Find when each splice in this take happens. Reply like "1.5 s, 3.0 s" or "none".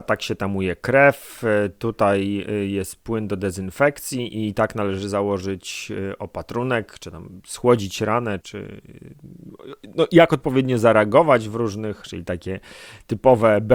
8.4 s, 12.0 s